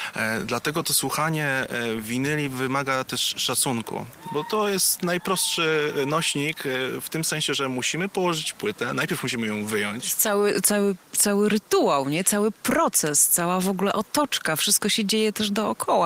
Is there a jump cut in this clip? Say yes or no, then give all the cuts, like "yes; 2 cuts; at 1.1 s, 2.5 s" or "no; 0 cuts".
no; 0 cuts